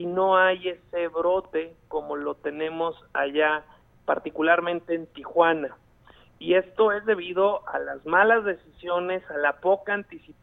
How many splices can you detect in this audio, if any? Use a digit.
0